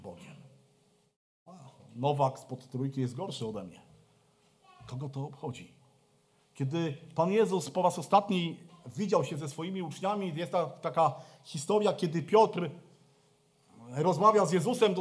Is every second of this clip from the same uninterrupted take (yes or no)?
yes